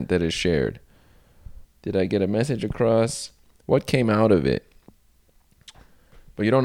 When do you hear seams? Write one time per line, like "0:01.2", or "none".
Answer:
0:01.6